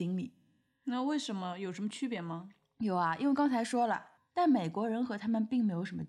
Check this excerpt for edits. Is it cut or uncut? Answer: cut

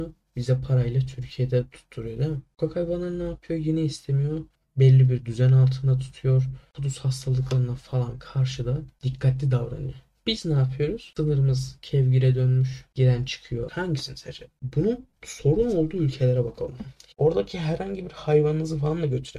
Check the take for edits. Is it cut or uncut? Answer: cut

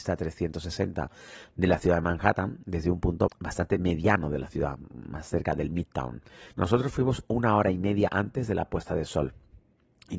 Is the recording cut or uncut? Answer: cut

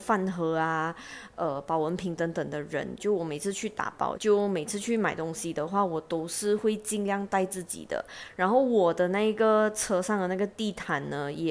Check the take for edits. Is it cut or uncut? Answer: cut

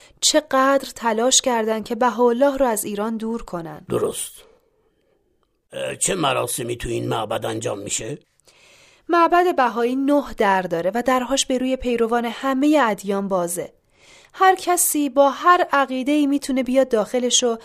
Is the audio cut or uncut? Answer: uncut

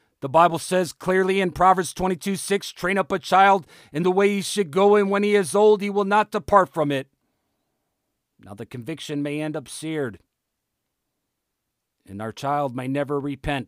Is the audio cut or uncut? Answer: uncut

